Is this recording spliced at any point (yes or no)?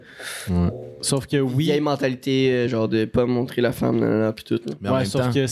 no